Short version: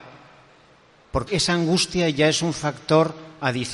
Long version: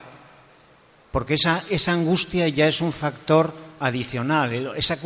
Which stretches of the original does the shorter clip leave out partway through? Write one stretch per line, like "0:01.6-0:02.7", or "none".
0:01.3-0:01.7